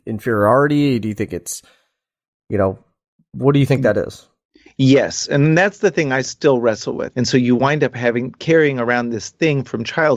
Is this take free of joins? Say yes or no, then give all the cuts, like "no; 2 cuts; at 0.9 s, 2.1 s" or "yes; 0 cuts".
no; 1 cut; at 7.1 s